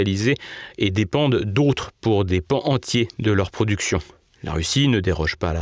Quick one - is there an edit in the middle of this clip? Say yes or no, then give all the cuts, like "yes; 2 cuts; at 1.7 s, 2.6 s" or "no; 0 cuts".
no; 0 cuts